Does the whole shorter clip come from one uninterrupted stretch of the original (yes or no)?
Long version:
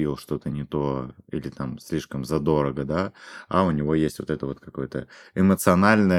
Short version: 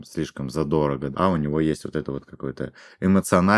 no